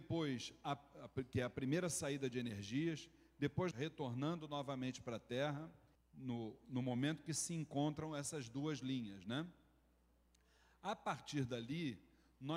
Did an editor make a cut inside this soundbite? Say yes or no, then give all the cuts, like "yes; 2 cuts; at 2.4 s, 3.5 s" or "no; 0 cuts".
yes; 2 cuts; at 3.7 s, 6.0 s